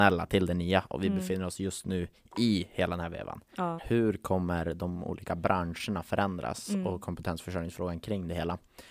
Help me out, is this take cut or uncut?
cut